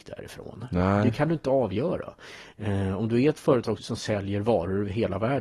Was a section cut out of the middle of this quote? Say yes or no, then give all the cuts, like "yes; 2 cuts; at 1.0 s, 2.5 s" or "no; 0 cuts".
yes; 1 cut; at 3.8 s